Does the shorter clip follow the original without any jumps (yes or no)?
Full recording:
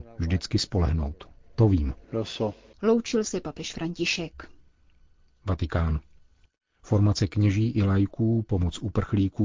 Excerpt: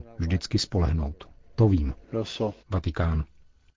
no